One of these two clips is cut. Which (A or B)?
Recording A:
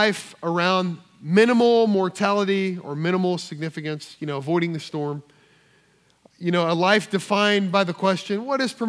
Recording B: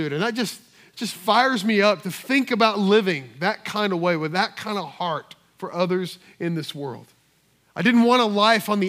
B